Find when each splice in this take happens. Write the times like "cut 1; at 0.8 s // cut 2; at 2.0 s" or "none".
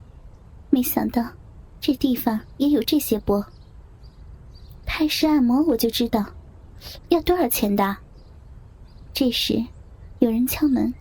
cut 1; at 4.8 s // cut 2; at 7.1 s // cut 3; at 9.1 s